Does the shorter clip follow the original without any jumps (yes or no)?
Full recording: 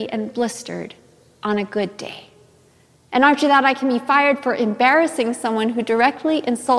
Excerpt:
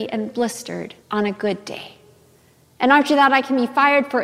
no